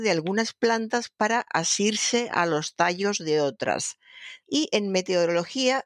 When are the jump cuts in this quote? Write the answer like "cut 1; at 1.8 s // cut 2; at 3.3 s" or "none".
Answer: cut 1; at 4.4 s

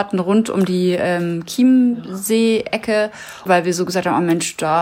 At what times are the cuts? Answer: cut 1; at 3.5 s

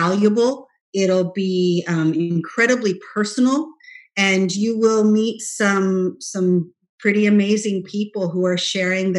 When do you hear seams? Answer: none

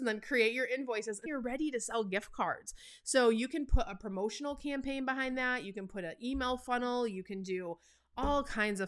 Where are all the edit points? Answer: cut 1; at 1.3 s

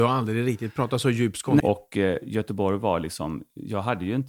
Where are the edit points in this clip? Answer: cut 1; at 1.6 s

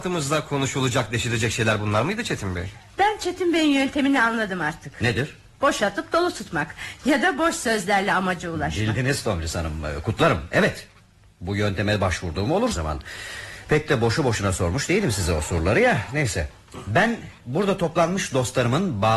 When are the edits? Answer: cut 1; at 12.7 s

